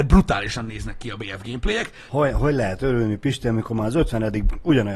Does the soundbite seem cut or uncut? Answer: cut